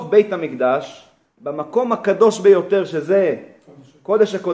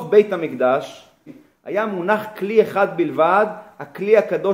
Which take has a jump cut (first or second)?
second